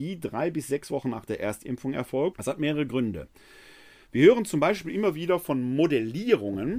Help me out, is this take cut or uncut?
cut